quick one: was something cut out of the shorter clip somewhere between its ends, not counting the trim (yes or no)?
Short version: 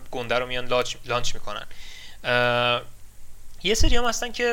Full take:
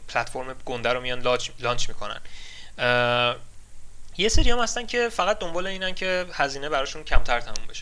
no